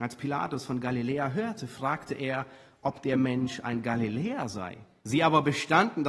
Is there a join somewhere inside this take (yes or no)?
yes